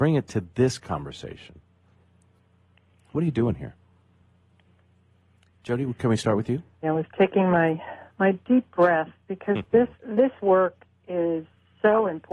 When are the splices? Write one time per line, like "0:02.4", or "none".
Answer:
0:06.8
0:09.9